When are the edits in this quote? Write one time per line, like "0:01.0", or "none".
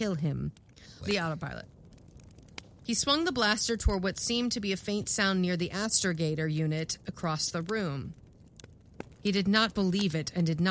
0:01.0
0:09.2